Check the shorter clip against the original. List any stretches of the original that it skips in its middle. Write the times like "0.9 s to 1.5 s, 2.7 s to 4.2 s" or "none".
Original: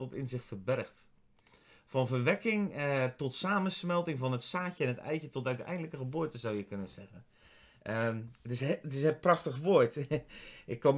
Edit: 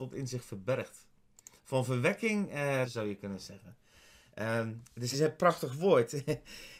1.6 s to 1.8 s, 3.1 s to 6.3 s, 8.6 s to 8.9 s